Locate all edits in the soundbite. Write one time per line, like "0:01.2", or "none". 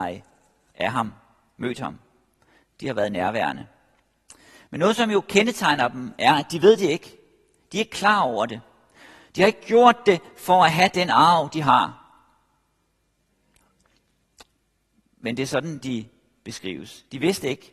none